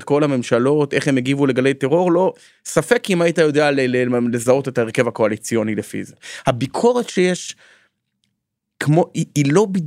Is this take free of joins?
yes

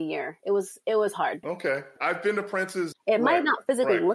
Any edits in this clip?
yes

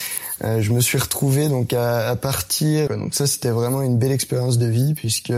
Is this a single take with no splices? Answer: no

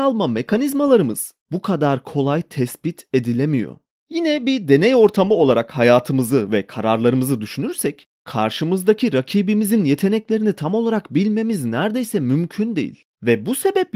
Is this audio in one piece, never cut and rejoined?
yes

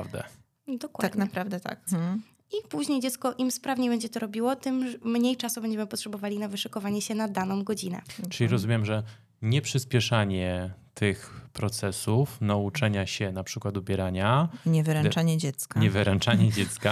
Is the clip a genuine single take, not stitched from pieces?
no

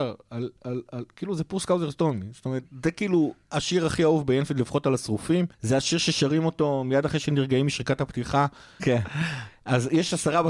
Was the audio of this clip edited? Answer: yes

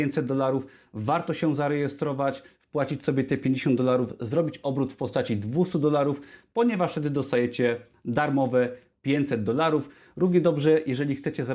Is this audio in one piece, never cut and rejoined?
yes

